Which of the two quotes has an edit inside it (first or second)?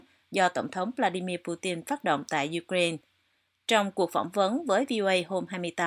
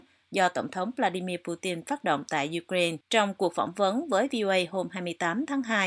second